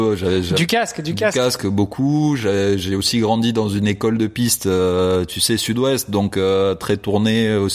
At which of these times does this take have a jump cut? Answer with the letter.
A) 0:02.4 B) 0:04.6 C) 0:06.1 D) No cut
D